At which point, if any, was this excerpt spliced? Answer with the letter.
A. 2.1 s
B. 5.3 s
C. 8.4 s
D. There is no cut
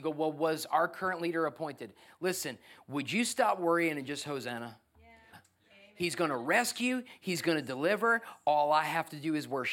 B